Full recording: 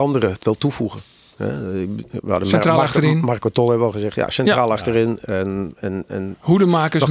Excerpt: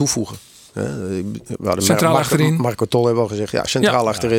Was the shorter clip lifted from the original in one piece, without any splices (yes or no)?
yes